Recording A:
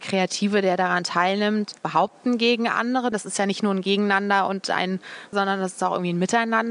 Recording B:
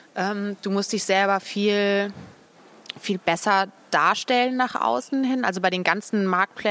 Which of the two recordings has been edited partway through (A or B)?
A